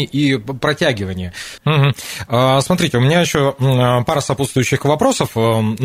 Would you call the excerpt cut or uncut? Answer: cut